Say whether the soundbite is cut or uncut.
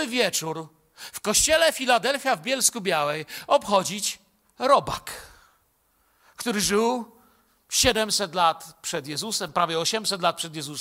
uncut